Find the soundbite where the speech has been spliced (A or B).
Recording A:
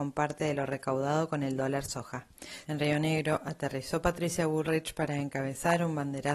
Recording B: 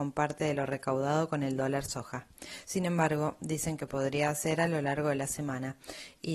A